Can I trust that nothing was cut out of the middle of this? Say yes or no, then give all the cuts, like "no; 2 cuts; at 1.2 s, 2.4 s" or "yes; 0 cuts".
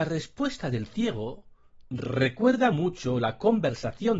yes; 0 cuts